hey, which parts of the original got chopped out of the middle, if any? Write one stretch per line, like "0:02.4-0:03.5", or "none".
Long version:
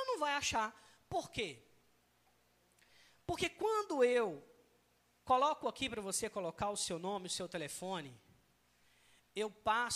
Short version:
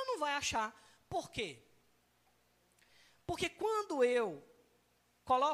none